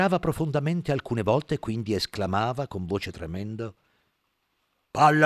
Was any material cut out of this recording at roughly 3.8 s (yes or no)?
no